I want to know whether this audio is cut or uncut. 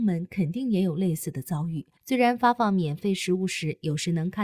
cut